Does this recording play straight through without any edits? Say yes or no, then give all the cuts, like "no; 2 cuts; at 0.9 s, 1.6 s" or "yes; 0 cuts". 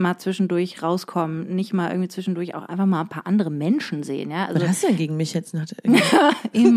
yes; 0 cuts